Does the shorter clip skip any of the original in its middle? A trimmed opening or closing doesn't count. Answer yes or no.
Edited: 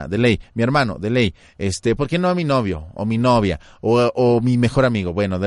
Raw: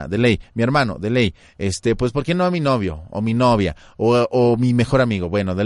yes